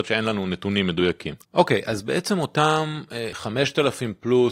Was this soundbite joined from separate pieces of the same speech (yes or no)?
yes